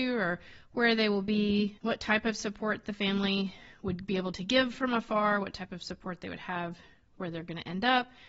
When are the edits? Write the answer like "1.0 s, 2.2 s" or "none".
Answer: 1.8 s